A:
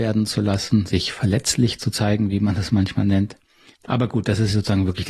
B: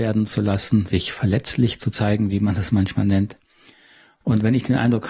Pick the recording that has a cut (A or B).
A